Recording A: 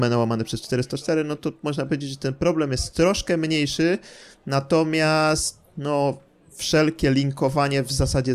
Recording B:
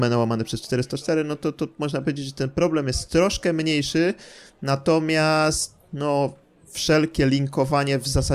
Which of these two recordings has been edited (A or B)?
A